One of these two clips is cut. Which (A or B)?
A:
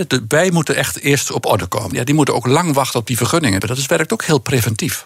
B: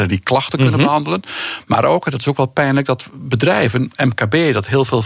A